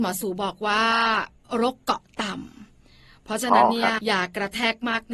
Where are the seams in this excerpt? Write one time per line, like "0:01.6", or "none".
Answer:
0:04.0